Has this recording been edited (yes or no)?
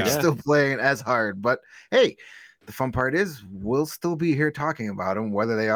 no